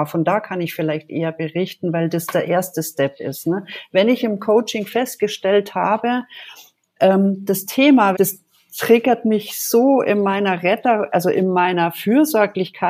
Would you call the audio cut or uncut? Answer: cut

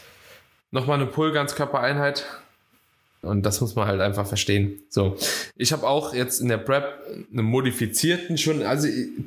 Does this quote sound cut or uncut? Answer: cut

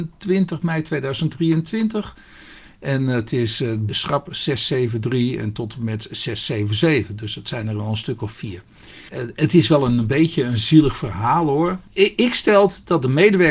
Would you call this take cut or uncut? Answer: cut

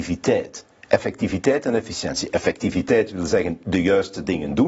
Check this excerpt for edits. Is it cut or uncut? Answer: uncut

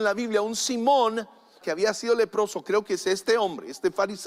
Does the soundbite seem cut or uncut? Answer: cut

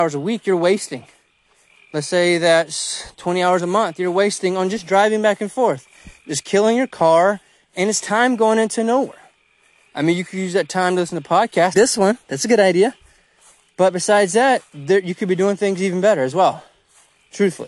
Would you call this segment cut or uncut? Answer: cut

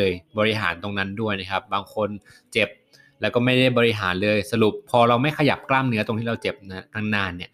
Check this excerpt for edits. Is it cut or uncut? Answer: cut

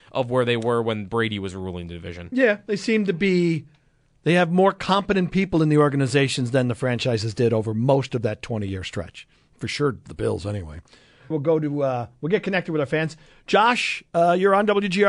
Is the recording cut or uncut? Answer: cut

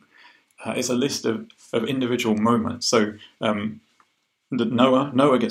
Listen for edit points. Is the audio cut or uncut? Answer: uncut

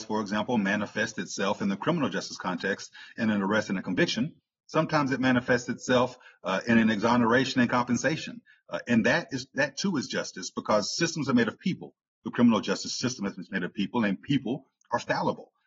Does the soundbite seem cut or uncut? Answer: uncut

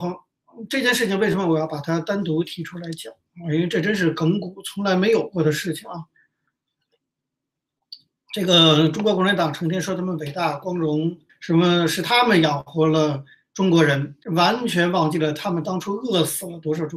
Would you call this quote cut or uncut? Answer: cut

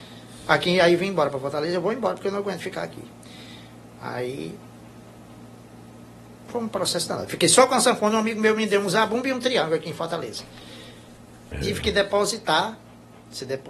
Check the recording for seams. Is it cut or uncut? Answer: cut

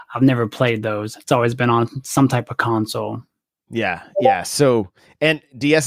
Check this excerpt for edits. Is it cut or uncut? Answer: cut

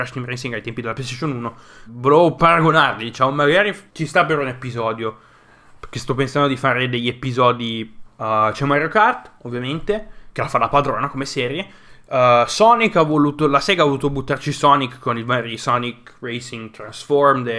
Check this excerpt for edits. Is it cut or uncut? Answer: cut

